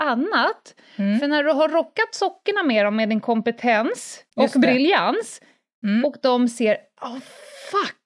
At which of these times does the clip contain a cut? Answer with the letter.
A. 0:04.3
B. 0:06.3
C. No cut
A